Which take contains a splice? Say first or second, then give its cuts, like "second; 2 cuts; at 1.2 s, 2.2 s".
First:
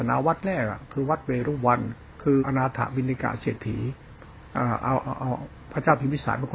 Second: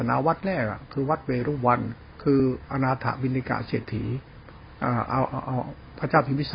first; 1 cut; at 2.4 s